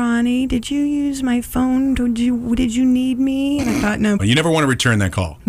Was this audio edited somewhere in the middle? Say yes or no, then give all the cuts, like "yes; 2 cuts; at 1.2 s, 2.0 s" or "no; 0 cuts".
yes; 1 cut; at 4.2 s